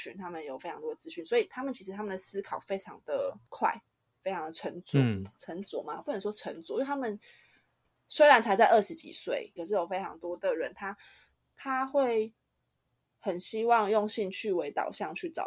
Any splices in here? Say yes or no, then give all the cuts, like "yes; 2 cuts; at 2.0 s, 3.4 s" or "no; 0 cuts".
yes; 1 cut; at 9.6 s